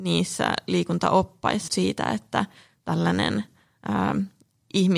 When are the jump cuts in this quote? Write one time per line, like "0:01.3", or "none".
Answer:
0:01.7